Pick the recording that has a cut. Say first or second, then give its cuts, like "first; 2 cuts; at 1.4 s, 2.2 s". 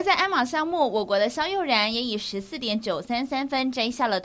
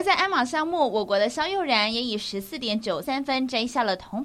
second; 1 cut; at 3.0 s